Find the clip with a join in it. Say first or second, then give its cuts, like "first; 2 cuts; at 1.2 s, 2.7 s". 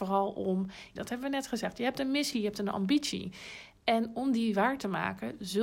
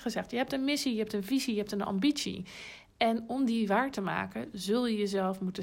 first; 2 cuts; at 1.0 s, 2.3 s